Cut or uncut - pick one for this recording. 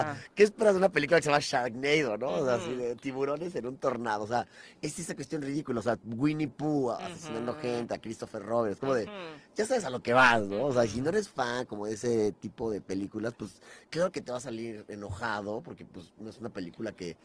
uncut